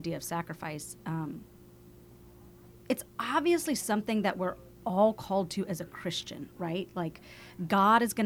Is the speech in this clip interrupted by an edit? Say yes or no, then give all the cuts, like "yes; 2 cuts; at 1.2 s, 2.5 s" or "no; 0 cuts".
no; 0 cuts